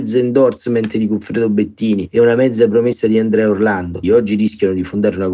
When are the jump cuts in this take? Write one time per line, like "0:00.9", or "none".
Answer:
0:04.0

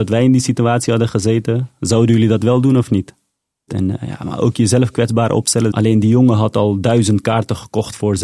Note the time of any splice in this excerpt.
0:03.7
0:05.7

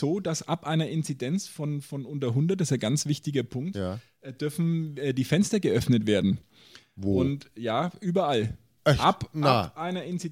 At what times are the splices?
none

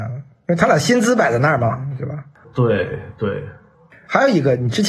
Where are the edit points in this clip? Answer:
none

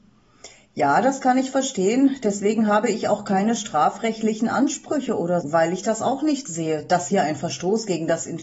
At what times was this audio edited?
0:05.4

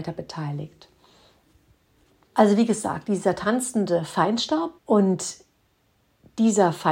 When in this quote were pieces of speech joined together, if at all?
0:02.2
0:04.8

